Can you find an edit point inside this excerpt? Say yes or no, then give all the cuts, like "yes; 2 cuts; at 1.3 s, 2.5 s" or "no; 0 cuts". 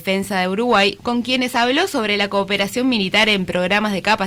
yes; 1 cut; at 1.0 s